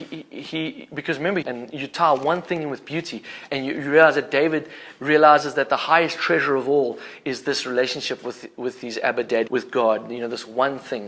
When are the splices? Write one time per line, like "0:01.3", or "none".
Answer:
0:01.4
0:09.5